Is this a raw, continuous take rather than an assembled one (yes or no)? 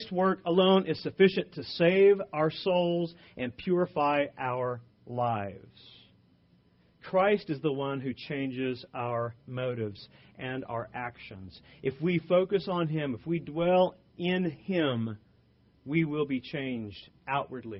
yes